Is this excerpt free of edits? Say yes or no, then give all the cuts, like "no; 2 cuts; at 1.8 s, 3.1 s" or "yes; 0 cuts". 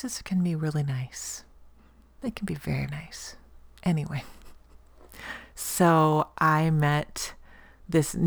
no; 1 cut; at 2.9 s